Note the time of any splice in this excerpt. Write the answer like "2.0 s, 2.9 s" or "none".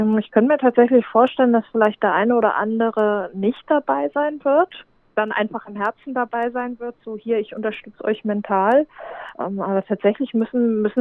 none